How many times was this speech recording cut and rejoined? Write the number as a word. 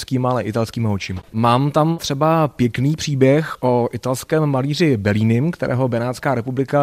one